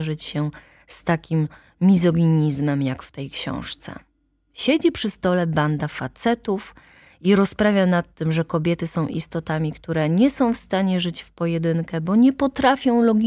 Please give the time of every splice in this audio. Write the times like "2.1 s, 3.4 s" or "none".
none